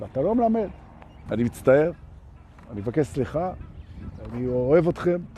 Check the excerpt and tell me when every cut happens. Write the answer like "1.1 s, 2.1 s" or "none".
1.3 s